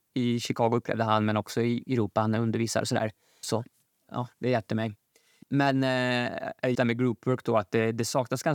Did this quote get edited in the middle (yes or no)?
yes